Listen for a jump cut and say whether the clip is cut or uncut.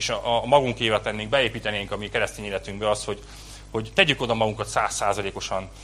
uncut